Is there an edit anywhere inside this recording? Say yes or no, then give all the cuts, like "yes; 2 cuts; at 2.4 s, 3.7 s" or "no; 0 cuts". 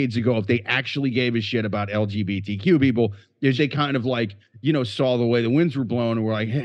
yes; 1 cut; at 3.6 s